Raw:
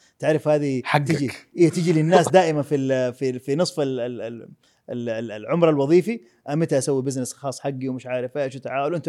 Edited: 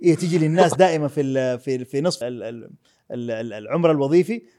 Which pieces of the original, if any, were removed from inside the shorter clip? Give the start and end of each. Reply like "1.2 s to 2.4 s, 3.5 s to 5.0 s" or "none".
3.8 s to 4.0 s